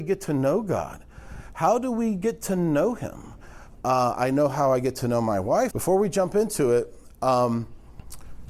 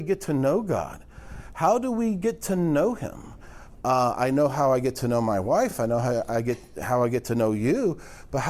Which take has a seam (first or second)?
first